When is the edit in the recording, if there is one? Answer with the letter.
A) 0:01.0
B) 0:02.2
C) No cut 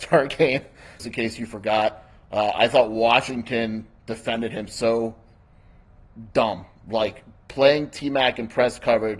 A